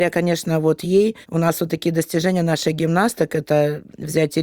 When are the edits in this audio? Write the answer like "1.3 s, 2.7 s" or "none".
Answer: 1.2 s